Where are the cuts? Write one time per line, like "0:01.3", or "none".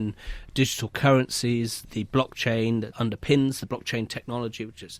none